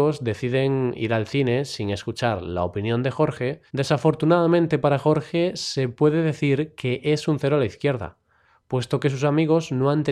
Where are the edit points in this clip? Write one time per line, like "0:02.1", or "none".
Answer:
0:03.7